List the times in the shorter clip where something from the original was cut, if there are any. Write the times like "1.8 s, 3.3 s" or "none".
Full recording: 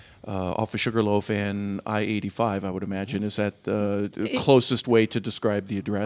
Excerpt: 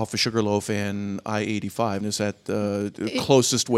2.0 s